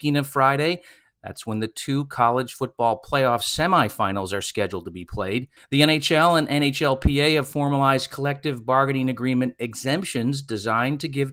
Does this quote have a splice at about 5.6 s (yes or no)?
yes